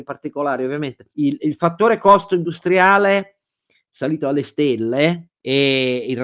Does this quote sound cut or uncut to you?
uncut